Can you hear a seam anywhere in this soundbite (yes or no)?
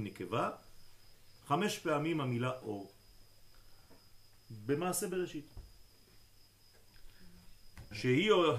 no